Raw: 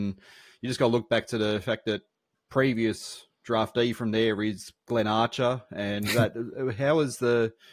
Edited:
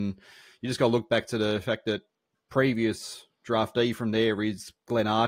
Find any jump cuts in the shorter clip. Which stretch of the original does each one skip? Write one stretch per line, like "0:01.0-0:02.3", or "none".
none